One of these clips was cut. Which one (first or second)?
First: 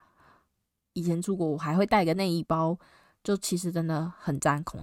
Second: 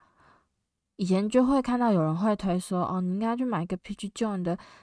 first